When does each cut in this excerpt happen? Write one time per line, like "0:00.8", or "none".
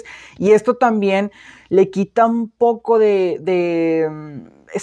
none

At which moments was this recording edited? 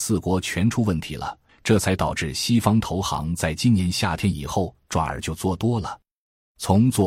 0:01.5

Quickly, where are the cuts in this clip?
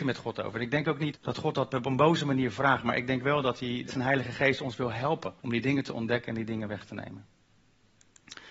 0:01.1
0:03.9
0:05.4

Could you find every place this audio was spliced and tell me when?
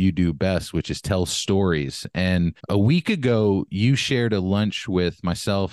0:02.6

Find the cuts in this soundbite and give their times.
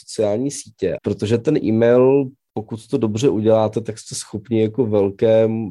0:01.0

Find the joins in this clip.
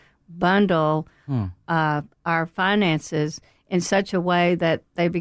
none

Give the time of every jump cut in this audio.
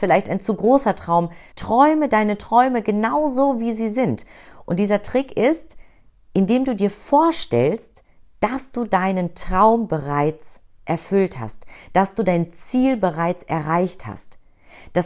0:01.5
0:04.7

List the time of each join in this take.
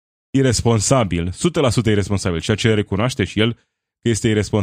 none

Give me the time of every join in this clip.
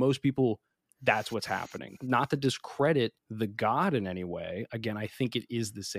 0:02.0
0:03.2

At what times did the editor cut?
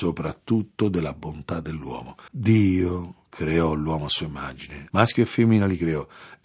0:02.3
0:04.9

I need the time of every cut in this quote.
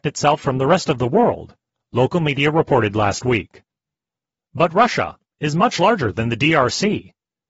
none

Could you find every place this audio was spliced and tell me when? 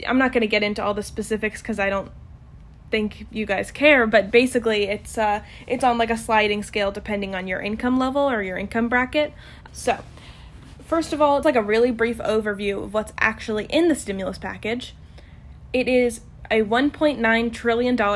0:09.7
0:11.4

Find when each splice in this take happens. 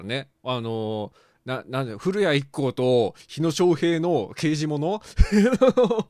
none

